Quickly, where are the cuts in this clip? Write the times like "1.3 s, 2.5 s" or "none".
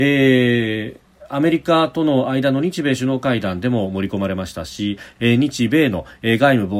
5.2 s

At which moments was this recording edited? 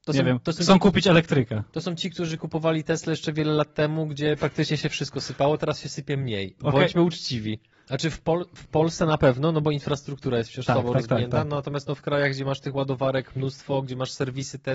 7.7 s

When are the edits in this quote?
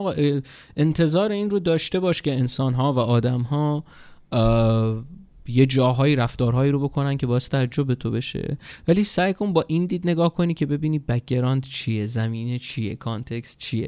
none

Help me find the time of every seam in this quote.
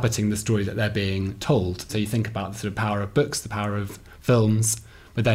1.9 s

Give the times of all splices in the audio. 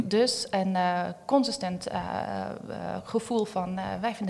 none

